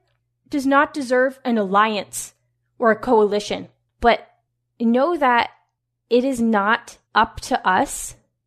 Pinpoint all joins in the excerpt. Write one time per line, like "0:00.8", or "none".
0:03.9
0:07.1